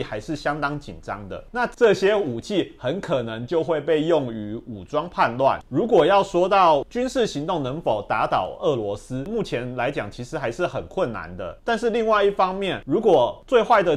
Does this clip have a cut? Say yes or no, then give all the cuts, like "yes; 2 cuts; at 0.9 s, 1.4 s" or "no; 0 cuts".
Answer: yes; 2 cuts; at 1.5 s, 5.6 s